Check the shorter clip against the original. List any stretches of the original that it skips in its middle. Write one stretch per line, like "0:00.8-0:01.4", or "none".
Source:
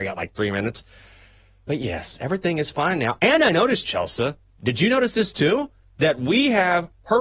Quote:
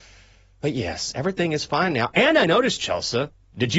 none